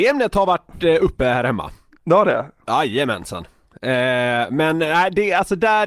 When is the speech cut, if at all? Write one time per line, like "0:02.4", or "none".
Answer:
none